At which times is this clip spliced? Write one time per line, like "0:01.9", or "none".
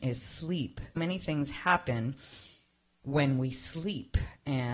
0:01.0